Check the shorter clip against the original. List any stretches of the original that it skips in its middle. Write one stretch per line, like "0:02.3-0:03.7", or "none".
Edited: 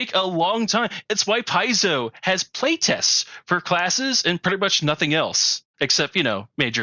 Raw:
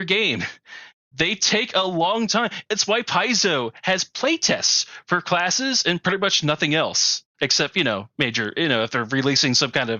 none